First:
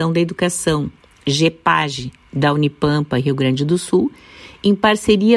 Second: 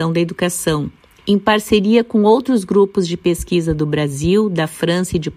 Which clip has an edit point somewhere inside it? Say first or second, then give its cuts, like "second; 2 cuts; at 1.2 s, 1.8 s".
second; 1 cut; at 1.2 s